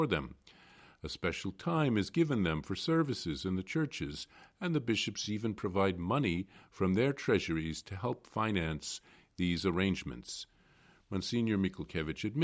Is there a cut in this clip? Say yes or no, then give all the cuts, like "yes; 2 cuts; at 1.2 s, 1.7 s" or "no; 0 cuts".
no; 0 cuts